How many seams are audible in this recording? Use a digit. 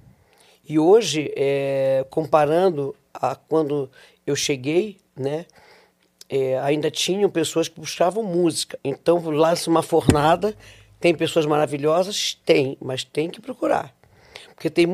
1